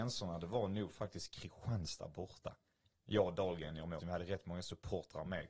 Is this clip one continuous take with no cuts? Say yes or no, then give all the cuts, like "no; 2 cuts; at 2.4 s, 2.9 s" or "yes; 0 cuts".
no; 2 cuts; at 2.9 s, 4.0 s